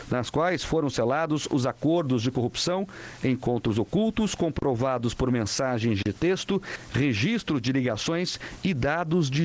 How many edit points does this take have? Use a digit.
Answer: 0